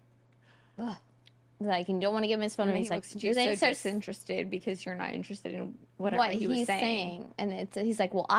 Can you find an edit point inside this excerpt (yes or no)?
no